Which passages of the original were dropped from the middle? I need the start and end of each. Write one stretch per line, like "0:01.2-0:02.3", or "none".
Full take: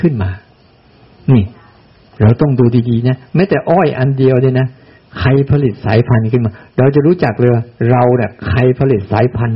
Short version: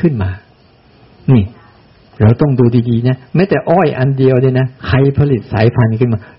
0:04.8-0:05.1